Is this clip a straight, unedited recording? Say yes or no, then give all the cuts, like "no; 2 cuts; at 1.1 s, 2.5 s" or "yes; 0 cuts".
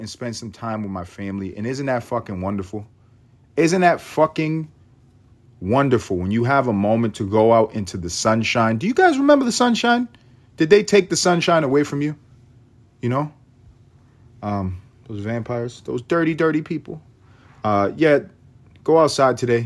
yes; 0 cuts